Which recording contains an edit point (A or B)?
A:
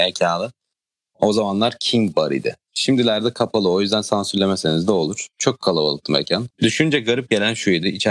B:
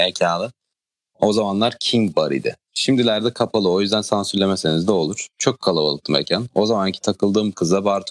A